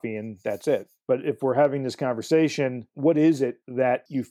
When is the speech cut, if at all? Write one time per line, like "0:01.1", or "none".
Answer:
none

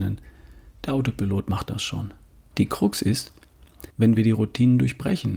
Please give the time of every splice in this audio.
0:02.5
0:03.9

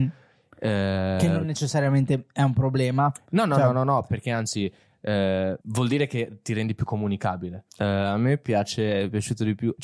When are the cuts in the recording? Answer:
0:05.6
0:07.7

